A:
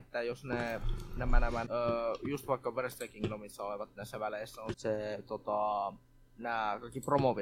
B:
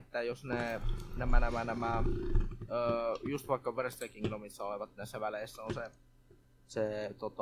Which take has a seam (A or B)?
A